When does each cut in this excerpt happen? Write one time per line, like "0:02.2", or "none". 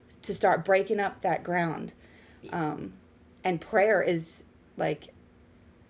none